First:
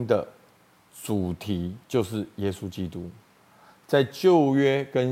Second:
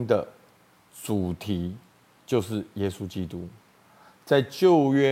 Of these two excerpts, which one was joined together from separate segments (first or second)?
first